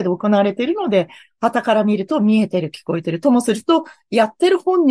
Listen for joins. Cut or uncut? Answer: uncut